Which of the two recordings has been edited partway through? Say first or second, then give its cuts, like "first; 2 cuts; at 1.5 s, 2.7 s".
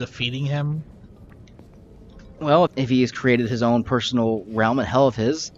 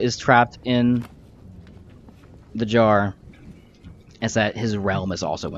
first; 1 cut; at 2.7 s